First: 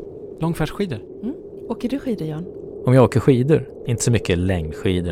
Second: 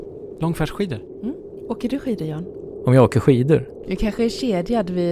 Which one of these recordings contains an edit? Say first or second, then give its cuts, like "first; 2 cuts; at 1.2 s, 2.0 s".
second; 1 cut; at 3.8 s